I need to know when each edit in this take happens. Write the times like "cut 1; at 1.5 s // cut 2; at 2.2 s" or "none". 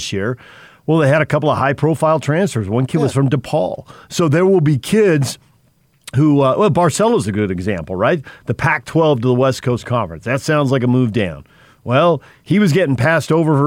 none